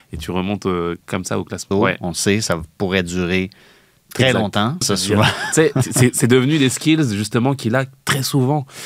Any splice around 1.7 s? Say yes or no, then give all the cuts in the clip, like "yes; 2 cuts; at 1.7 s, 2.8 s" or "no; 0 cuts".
yes; 2 cuts; at 1.7 s, 4.8 s